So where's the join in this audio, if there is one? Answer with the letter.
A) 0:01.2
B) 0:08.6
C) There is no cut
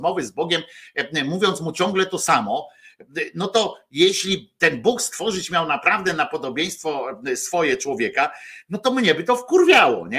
C